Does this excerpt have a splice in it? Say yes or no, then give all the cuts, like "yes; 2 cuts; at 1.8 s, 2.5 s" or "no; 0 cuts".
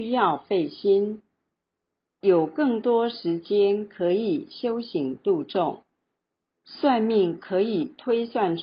yes; 1 cut; at 6.5 s